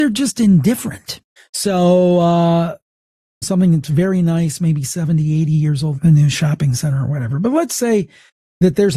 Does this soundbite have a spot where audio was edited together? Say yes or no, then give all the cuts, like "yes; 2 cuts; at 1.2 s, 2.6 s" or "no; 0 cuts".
yes; 3 cuts; at 1.4 s, 3.4 s, 6.0 s